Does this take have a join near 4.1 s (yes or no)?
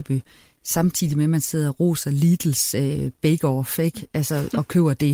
no